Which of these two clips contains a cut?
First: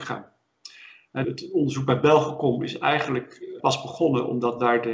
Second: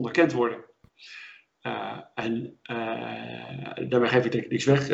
first; 2 cuts; at 1.2 s, 3.6 s

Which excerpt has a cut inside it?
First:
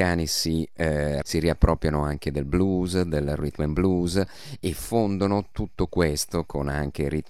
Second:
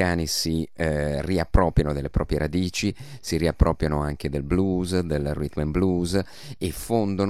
first; 1 cut; at 1.2 s

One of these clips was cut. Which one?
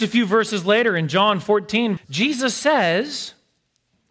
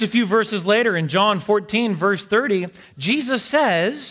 first; 1 cut; at 2.0 s

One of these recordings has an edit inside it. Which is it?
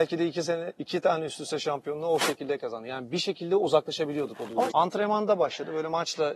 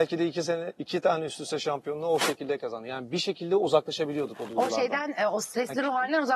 first; 1 cut; at 4.7 s

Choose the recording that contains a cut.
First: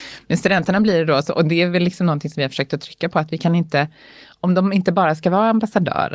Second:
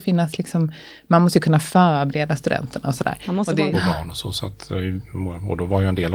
second; 1 cut; at 3.7 s

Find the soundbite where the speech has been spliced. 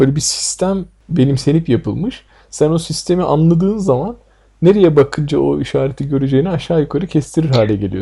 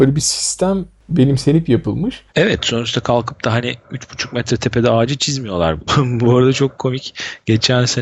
second; 2 cuts; at 2.3 s, 5.9 s

